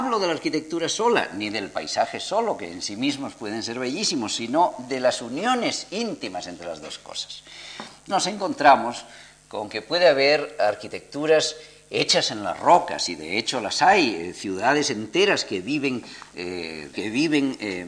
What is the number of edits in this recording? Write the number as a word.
two